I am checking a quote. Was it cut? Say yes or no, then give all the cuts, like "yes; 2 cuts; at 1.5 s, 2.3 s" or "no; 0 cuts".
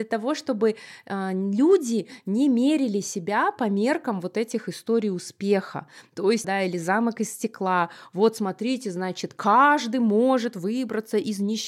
yes; 1 cut; at 6.4 s